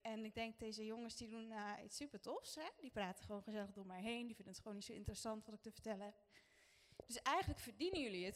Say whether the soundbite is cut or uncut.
uncut